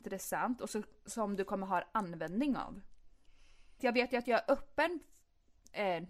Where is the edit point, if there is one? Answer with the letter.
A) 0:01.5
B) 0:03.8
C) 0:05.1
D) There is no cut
B